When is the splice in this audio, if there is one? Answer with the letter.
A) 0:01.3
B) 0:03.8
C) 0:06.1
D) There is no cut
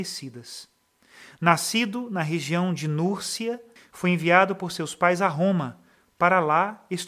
B